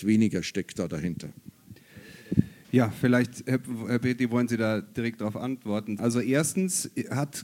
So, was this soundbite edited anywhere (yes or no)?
yes